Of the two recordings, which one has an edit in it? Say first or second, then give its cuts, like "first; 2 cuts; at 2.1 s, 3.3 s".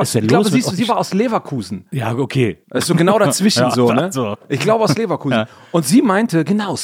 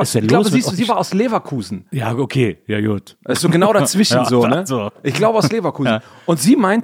first; 1 cut; at 2.6 s